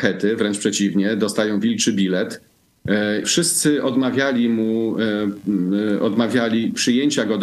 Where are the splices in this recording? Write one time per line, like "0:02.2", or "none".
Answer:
0:03.2